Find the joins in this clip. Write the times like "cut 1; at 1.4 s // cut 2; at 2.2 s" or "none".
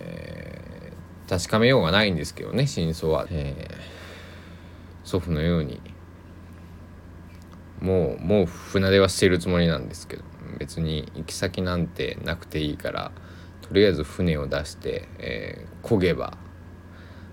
cut 1; at 3.3 s